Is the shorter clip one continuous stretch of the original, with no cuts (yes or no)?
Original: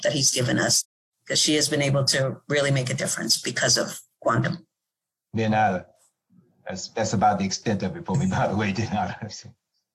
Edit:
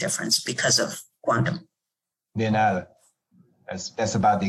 yes